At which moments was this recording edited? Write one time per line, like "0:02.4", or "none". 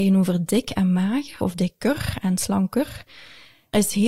0:01.4